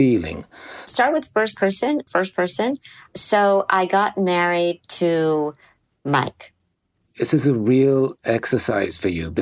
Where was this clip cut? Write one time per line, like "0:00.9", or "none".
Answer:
0:02.1
0:07.1